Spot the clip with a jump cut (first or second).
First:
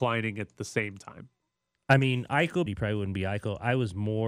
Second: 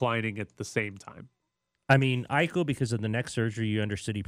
first